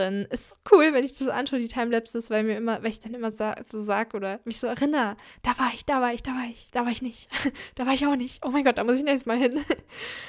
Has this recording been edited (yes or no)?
no